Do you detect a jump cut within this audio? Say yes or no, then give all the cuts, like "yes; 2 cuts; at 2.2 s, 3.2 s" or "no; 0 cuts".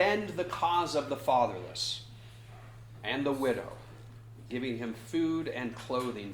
yes; 1 cut; at 4.5 s